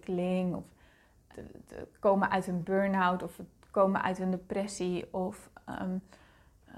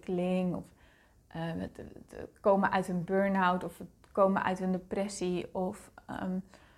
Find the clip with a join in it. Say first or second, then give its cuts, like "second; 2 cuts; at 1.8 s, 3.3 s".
first; 1 cut; at 1.3 s